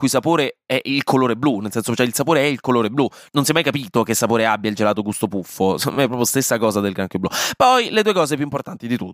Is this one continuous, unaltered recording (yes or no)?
yes